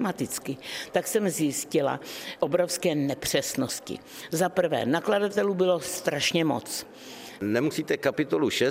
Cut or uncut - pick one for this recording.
cut